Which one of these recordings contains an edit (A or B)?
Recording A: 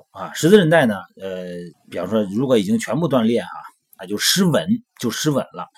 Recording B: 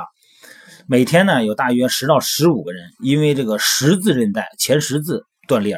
A